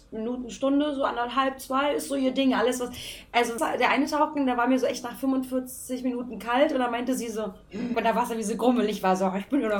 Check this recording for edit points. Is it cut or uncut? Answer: cut